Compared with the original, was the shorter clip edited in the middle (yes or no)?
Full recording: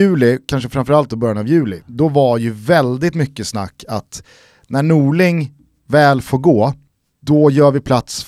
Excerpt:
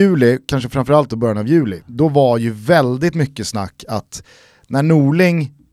no